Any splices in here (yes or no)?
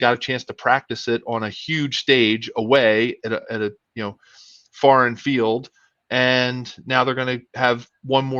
no